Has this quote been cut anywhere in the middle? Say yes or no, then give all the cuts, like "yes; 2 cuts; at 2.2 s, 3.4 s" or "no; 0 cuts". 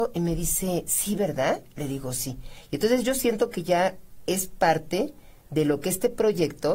no; 0 cuts